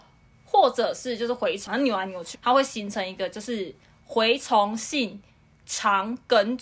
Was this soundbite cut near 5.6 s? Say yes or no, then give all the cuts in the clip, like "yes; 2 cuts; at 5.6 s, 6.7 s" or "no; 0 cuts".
no; 1 cut; at 2.3 s